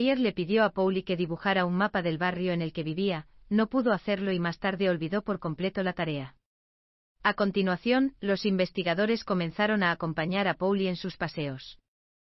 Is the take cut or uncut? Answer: uncut